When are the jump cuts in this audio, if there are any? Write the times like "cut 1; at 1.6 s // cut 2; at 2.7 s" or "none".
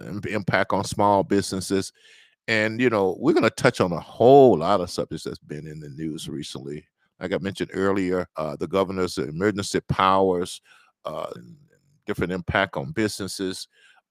cut 1; at 8.3 s // cut 2; at 11.4 s